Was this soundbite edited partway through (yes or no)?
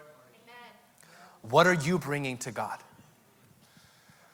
no